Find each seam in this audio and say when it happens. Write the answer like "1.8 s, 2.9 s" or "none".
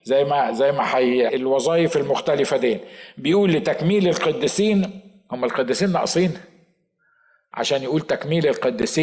1.3 s